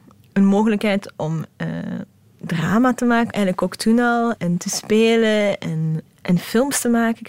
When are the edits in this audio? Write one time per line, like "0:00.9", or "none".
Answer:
0:03.3
0:04.4
0:06.0